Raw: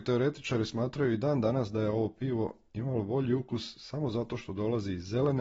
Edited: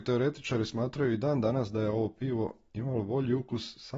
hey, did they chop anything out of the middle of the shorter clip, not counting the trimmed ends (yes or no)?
no